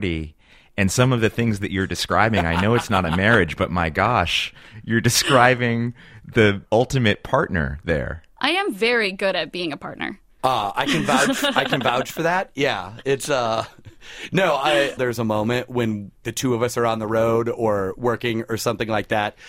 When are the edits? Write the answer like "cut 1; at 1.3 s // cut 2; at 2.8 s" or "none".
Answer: cut 1; at 15.0 s